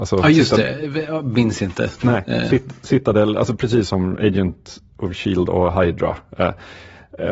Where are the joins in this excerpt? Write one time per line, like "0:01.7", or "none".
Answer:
none

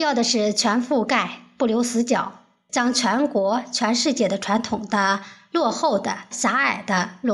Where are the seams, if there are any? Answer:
0:02.7
0:06.3

